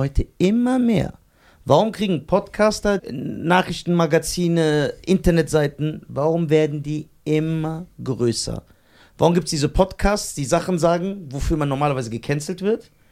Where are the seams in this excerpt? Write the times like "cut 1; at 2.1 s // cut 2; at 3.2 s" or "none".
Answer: cut 1; at 3.0 s

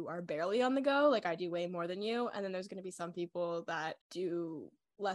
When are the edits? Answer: cut 1; at 4.0 s

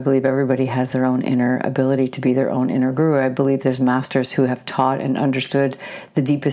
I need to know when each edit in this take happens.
none

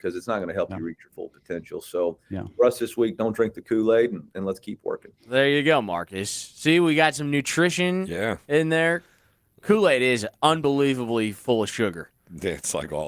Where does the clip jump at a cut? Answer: none

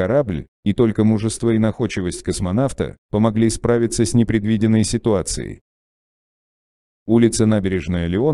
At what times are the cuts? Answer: cut 1; at 6.9 s

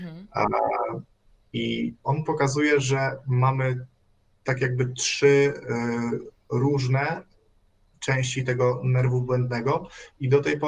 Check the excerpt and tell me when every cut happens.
cut 1; at 1.4 s

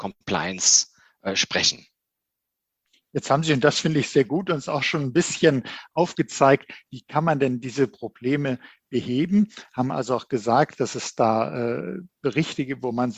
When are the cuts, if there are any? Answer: none

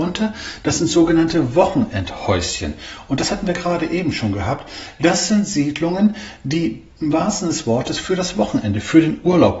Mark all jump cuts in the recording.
none

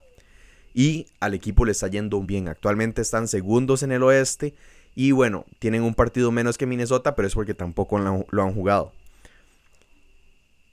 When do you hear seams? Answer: cut 1; at 2.2 s

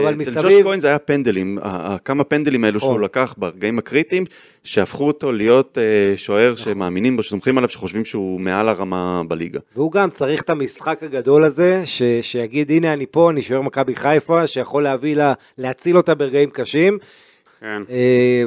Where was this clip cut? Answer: cut 1; at 17.5 s

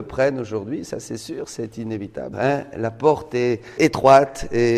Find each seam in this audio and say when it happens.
cut 1; at 2.3 s // cut 2; at 3.8 s

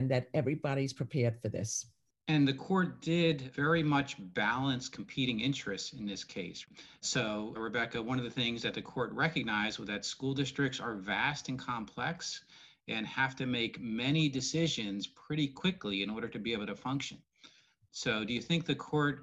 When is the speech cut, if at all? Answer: none

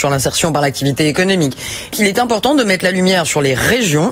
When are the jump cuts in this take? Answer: cut 1; at 1.9 s

